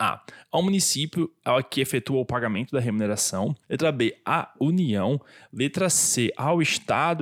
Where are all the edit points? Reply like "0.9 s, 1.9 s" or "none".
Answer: 3.6 s